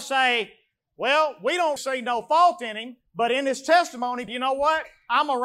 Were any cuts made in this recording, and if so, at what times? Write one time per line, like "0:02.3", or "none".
0:01.8
0:04.3